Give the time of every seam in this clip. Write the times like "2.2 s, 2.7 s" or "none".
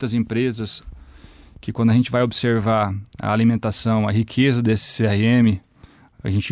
none